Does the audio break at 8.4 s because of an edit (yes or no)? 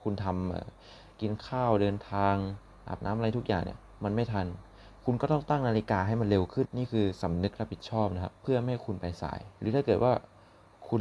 yes